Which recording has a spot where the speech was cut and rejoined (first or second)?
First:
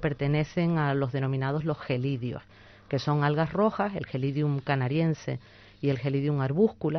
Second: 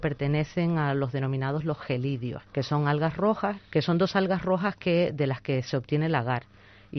second